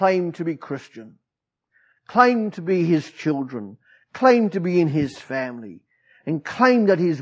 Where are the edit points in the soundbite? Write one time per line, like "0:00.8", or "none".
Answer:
none